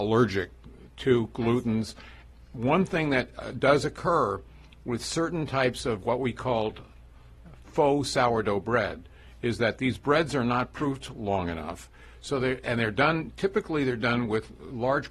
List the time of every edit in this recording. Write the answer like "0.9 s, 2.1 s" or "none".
none